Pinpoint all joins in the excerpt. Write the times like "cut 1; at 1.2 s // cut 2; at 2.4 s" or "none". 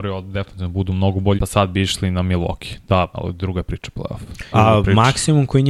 cut 1; at 1.4 s // cut 2; at 3.1 s // cut 3; at 4.5 s